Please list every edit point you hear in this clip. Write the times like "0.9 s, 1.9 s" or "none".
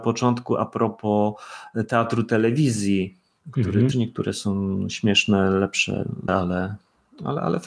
3.9 s, 6.3 s